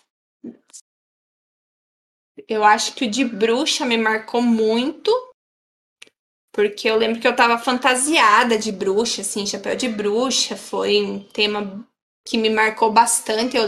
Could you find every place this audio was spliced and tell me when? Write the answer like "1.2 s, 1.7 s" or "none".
none